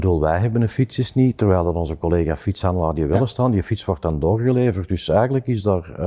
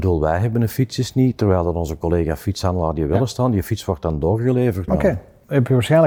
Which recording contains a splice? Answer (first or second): second